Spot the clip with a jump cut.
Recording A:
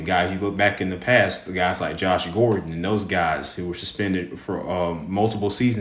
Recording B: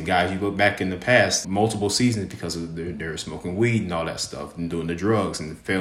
B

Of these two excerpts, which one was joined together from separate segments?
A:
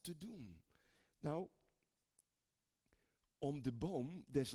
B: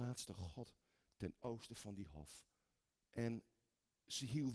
B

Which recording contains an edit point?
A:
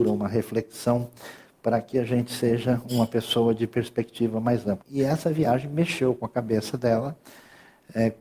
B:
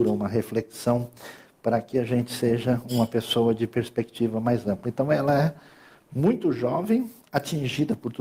A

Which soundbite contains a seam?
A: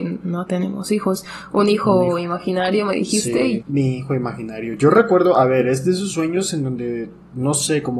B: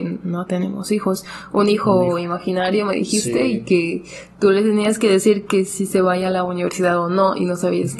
A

